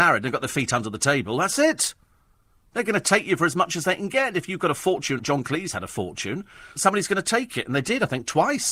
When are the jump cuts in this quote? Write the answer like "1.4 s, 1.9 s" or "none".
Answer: 5.2 s, 6.8 s